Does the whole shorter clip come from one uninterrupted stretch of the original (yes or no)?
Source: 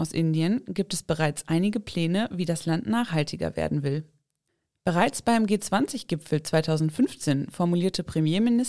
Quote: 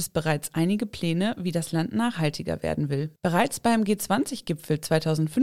no